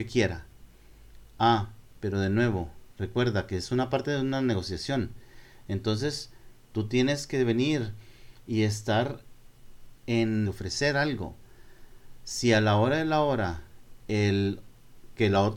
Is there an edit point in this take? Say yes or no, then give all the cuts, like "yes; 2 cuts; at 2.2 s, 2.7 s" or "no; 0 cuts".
yes; 1 cut; at 10.4 s